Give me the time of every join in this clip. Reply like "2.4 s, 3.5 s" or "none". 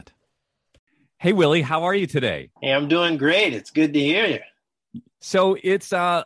2.6 s, 5.1 s